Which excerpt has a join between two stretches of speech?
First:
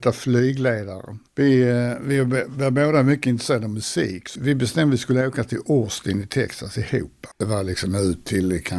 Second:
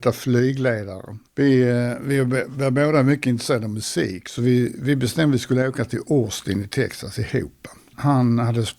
first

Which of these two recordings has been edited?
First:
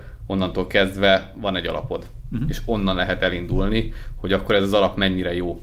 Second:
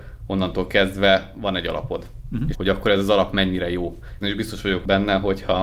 second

